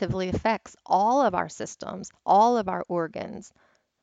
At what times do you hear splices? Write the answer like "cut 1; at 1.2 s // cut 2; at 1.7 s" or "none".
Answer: cut 1; at 2.2 s